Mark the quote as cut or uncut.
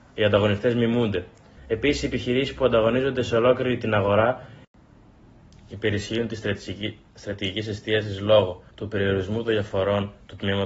cut